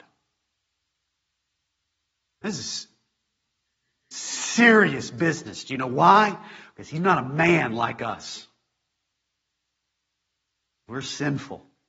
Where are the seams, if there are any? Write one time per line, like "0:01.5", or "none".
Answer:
none